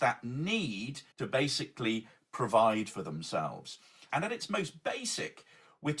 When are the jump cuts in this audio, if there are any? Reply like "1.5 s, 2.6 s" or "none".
1.1 s, 4.1 s